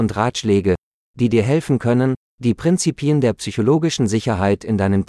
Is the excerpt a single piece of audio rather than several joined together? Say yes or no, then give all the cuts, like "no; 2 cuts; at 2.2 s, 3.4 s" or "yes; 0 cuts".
yes; 0 cuts